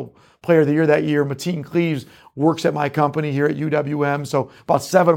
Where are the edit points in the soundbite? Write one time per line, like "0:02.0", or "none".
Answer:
none

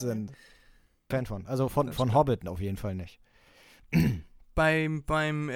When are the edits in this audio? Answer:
0:01.1

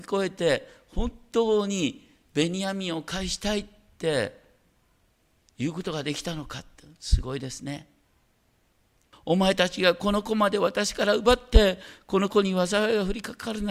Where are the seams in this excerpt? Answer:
0:09.1

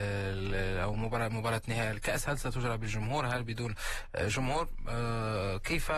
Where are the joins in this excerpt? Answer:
none

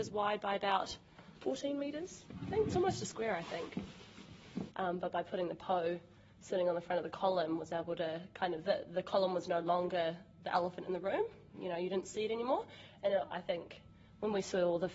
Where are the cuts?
0:04.7

